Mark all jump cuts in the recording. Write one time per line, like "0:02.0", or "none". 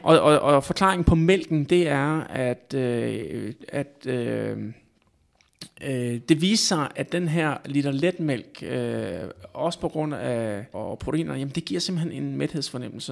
0:06.9
0:10.7